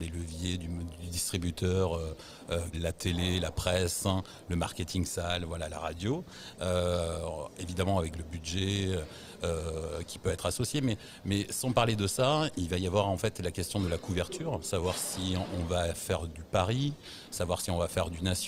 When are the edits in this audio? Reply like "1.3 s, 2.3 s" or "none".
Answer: 2.7 s, 6.5 s